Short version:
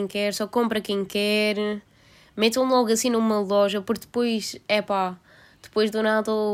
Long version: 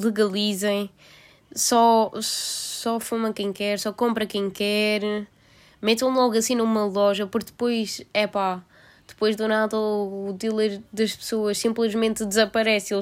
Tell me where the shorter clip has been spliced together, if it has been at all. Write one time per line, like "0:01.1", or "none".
none